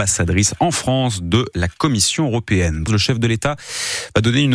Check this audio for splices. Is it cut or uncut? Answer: cut